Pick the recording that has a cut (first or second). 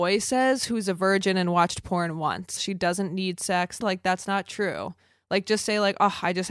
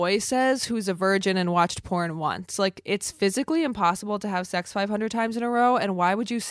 first